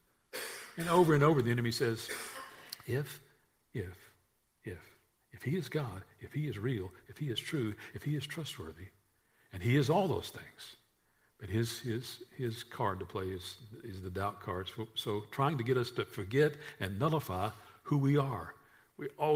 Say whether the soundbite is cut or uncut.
uncut